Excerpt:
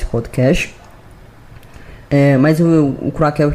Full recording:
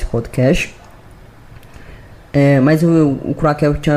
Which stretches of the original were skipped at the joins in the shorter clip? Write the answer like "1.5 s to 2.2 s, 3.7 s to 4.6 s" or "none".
2.0 s to 2.3 s